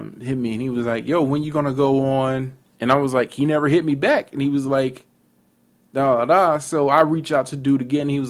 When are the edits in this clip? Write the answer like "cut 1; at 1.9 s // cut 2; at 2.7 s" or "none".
none